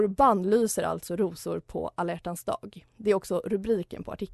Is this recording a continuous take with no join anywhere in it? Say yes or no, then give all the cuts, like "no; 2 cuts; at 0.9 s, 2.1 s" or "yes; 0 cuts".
yes; 0 cuts